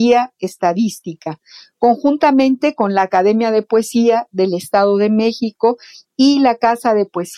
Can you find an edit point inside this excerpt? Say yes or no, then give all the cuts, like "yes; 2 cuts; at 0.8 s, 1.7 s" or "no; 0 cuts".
no; 0 cuts